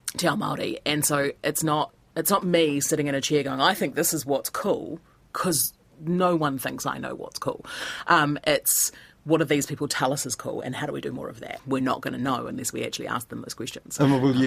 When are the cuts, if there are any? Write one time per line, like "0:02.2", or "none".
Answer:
0:11.6